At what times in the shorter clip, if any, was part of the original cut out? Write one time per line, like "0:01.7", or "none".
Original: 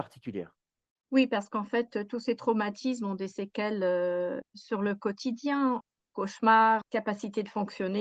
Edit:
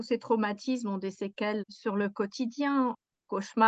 0:01.6